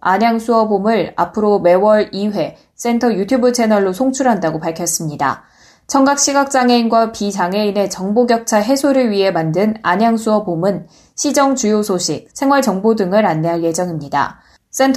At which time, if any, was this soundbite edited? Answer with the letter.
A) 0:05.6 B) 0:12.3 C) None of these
B